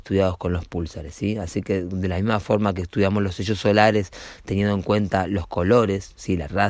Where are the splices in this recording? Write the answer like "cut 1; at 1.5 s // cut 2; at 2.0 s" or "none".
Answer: none

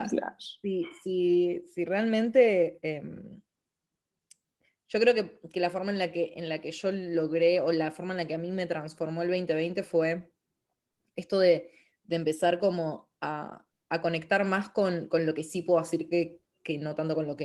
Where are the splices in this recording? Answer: none

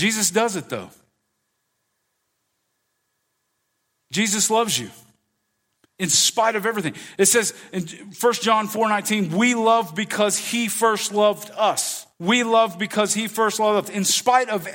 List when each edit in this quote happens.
cut 1; at 12.1 s

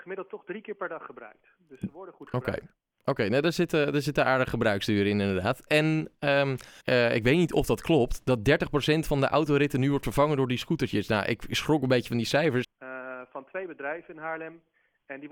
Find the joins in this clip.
cut 1; at 6.8 s // cut 2; at 12.6 s

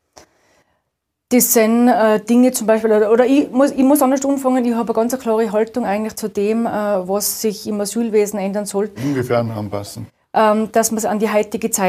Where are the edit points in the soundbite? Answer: cut 1; at 8.9 s

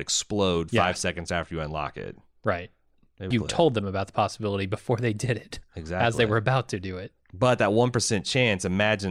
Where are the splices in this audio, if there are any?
cut 1; at 3.3 s

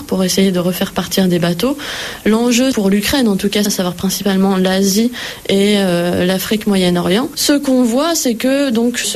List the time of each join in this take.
cut 1; at 3.7 s

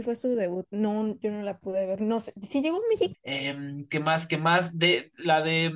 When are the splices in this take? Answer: cut 1; at 3.1 s

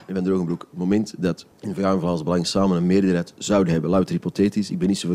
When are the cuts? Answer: cut 1; at 1.5 s

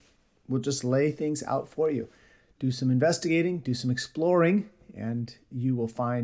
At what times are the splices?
none

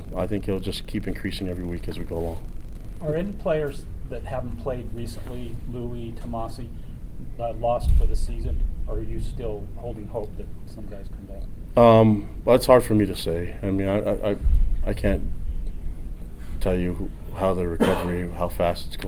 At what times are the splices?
none

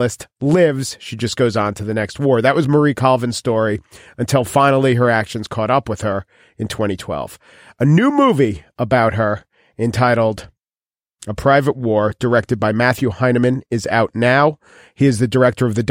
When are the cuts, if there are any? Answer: none

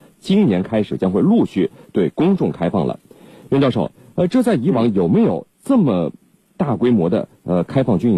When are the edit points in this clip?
none

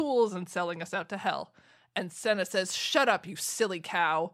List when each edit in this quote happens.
none

